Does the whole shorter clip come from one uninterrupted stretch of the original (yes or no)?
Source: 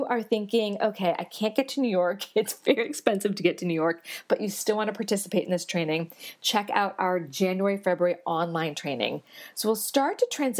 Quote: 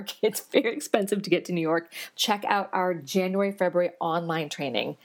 no